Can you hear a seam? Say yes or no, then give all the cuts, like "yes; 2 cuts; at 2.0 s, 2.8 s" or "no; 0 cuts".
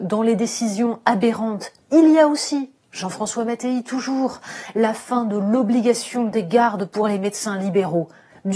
no; 0 cuts